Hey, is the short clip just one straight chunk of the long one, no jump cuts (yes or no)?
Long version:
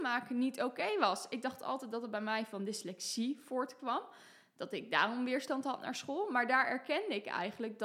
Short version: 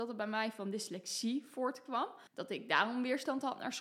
no